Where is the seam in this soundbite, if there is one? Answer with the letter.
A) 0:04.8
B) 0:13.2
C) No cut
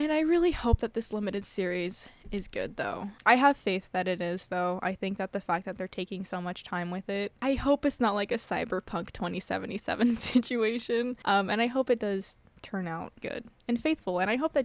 B